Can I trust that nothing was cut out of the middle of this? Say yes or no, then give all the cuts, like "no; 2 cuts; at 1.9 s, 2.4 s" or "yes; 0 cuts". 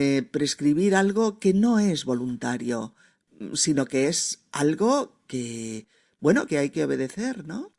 no; 1 cut; at 6.5 s